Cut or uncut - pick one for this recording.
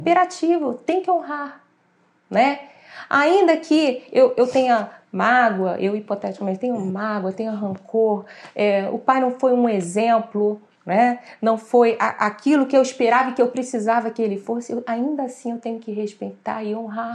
uncut